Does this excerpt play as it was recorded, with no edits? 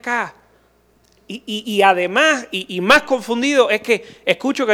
yes; 0 cuts

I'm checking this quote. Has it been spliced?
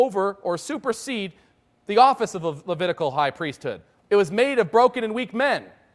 yes; 1 cut; at 4.0 s

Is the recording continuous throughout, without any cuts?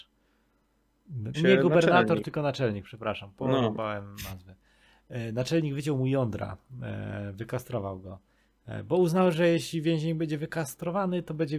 no; 1 cut; at 1.3 s

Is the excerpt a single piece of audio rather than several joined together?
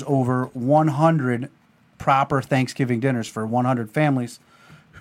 yes; 0 cuts

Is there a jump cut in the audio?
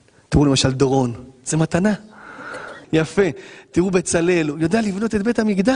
yes; 1 cut; at 2.8 s

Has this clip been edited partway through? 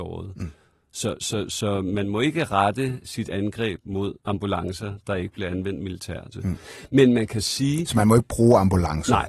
yes; 2 cuts; at 4.2 s, 6.3 s

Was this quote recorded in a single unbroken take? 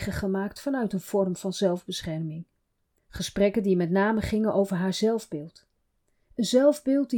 no; 1 cut; at 3.0 s

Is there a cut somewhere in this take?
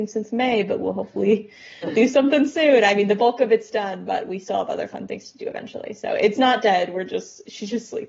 no; 0 cuts

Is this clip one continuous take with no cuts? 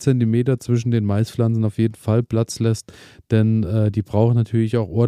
yes; 0 cuts

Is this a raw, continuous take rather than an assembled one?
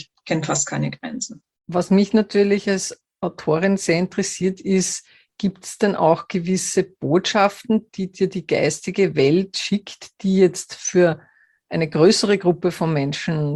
yes; 0 cuts

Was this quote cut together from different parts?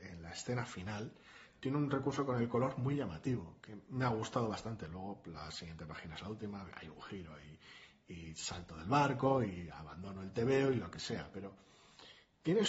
no; 0 cuts

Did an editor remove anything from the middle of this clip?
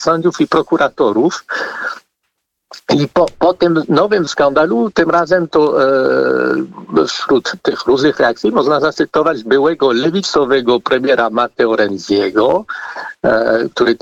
no; 0 cuts

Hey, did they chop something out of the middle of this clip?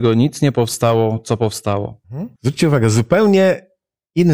yes; 1 cut; at 2.4 s

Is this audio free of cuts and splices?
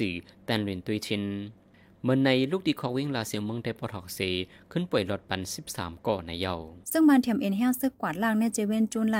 no; 1 cut; at 6.8 s

